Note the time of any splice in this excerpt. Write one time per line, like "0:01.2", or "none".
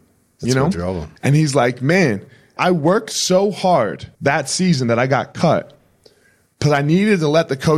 0:01.2
0:02.6
0:04.2